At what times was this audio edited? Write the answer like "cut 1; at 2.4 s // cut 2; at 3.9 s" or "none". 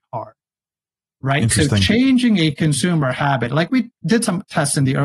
none